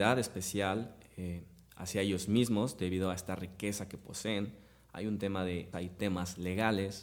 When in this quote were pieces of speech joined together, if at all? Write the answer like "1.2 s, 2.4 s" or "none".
5.7 s